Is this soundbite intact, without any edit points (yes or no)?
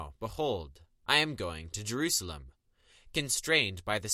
yes